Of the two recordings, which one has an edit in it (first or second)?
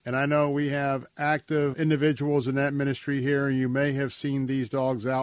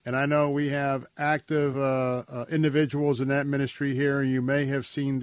first